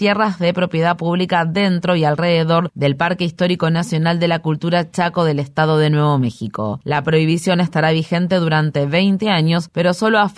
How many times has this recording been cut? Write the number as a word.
zero